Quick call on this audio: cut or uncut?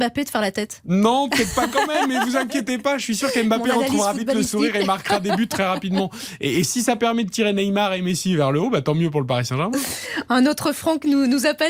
uncut